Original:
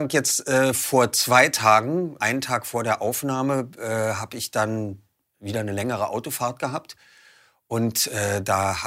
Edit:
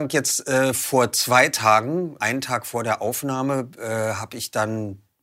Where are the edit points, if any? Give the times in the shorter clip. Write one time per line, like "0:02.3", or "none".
none